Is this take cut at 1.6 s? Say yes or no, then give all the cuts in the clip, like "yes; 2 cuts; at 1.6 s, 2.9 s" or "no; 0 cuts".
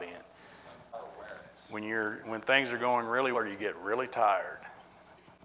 no; 1 cut; at 3.3 s